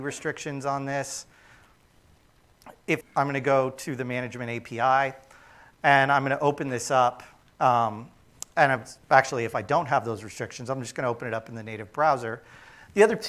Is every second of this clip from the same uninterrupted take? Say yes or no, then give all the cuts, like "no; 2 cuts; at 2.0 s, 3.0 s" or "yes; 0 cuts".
no; 1 cut; at 3.0 s